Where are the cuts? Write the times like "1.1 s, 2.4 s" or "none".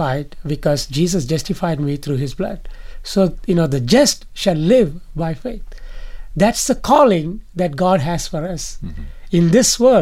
none